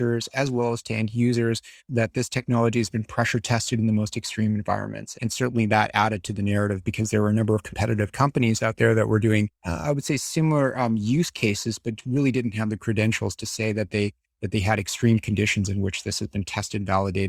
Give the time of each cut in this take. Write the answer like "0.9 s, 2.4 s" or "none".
5.1 s, 9.6 s